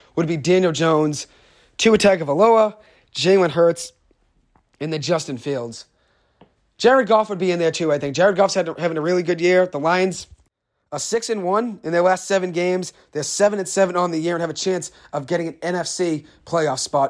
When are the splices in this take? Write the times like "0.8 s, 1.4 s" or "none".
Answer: none